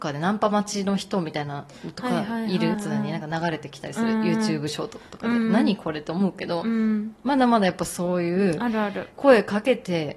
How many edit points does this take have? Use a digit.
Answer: 1